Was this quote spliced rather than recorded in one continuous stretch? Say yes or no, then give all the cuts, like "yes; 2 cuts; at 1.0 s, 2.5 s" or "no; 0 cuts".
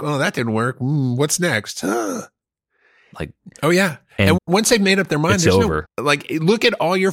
yes; 3 cuts; at 3.1 s, 4.4 s, 5.8 s